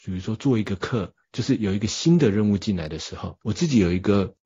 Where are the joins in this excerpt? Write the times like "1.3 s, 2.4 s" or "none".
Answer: 1.2 s, 3.4 s